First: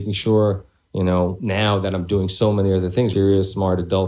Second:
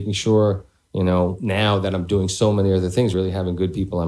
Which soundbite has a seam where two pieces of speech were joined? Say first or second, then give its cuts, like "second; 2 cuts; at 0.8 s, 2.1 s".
first; 1 cut; at 3.1 s